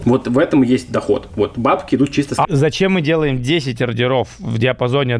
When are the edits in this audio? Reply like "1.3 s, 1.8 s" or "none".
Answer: 2.4 s